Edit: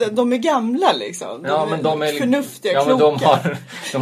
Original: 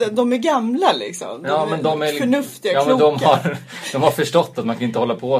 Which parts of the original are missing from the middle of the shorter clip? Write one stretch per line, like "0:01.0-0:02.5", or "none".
none